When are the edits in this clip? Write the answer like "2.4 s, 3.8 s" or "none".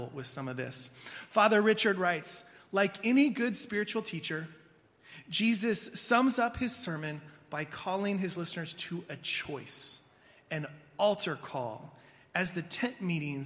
none